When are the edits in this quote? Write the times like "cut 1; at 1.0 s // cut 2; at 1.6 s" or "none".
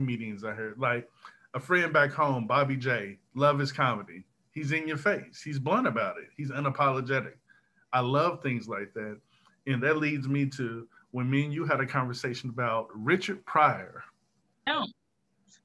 cut 1; at 14.7 s